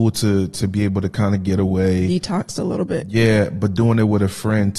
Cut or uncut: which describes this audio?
uncut